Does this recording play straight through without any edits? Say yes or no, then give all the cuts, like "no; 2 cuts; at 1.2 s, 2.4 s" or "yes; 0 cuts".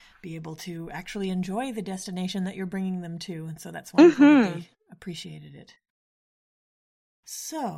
yes; 0 cuts